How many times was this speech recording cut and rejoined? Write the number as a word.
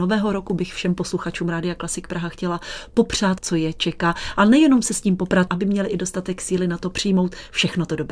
two